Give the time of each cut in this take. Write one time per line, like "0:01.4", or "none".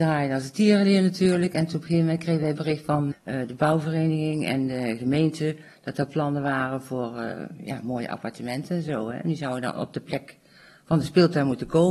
0:03.1